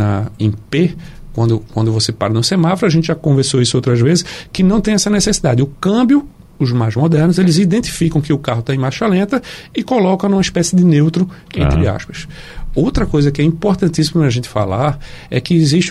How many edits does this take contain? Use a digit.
0